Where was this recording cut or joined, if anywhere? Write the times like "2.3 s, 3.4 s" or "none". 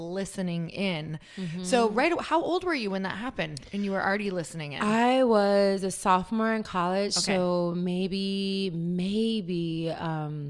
none